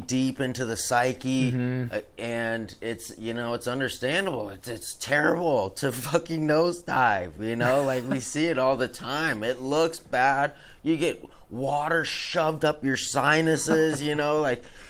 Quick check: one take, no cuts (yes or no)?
yes